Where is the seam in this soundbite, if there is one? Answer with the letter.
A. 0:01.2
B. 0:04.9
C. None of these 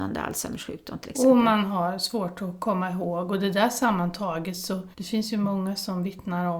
B